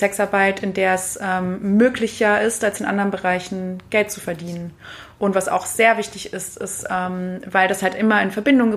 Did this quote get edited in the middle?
no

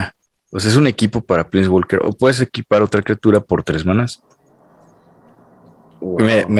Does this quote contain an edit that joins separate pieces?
no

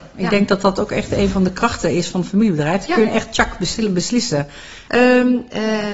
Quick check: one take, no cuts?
no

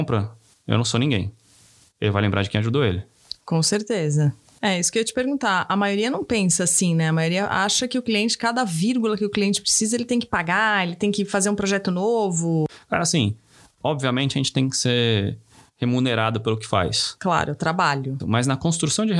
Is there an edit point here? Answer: yes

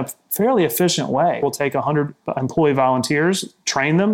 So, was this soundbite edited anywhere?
yes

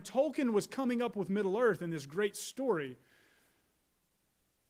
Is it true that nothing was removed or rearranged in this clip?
yes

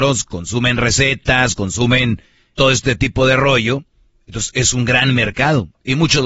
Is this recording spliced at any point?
yes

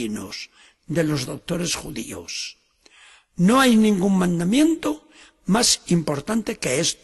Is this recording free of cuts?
yes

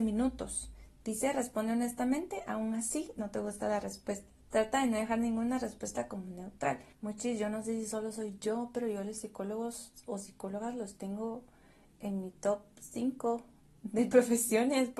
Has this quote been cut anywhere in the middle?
yes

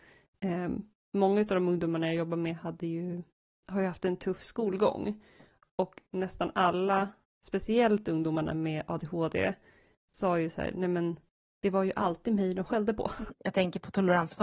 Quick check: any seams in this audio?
yes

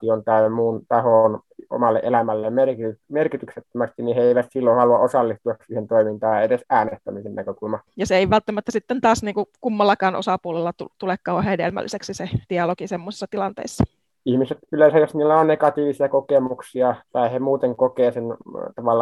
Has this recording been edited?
yes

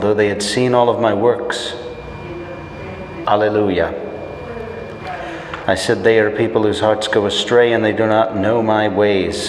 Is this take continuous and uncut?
no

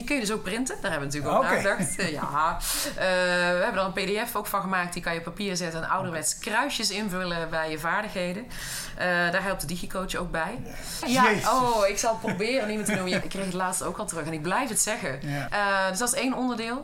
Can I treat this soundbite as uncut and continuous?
no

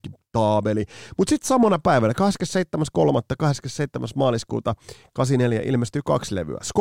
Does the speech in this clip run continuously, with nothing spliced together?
yes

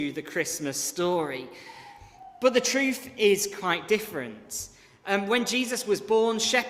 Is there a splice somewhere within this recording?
no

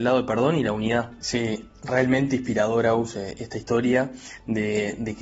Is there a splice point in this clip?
yes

